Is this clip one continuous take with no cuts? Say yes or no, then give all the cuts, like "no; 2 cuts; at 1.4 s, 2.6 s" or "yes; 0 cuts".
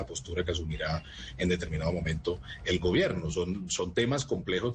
yes; 0 cuts